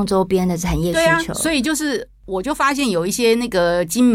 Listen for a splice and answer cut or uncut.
uncut